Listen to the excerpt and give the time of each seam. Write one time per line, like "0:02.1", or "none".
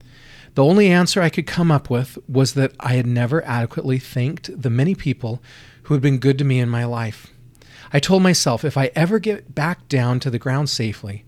none